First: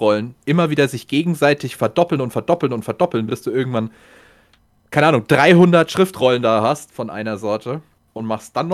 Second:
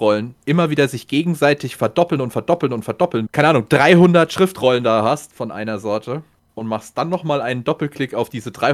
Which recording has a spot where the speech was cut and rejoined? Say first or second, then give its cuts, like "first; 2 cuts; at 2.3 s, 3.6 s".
second; 1 cut; at 3.3 s